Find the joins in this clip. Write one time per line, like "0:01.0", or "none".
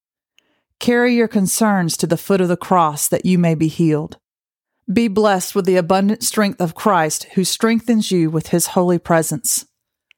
0:04.8